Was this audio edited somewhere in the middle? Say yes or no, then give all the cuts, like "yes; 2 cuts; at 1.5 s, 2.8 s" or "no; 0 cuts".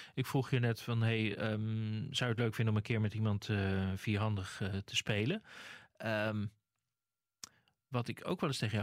no; 0 cuts